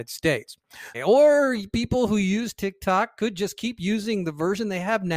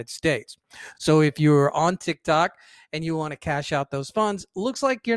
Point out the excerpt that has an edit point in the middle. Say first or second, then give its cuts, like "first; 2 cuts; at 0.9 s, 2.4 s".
first; 1 cut; at 0.9 s